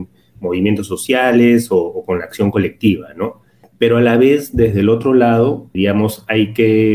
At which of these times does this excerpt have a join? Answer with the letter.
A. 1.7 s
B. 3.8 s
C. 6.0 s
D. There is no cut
D